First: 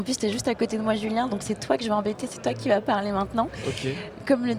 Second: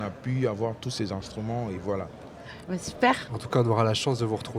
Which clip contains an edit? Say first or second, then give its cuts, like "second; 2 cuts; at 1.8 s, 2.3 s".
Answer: second; 1 cut; at 3.3 s